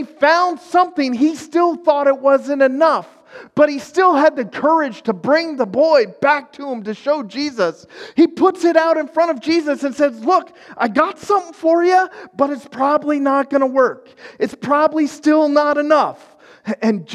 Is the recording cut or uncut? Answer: uncut